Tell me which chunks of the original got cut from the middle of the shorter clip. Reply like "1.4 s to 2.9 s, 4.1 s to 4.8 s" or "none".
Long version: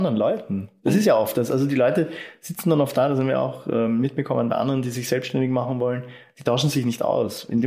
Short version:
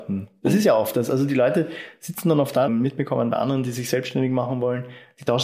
3.1 s to 3.9 s